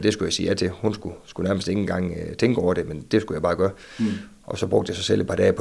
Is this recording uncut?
yes; 0 cuts

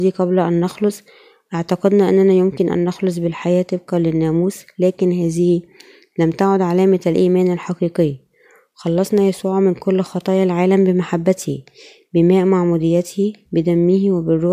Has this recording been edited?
no; 0 cuts

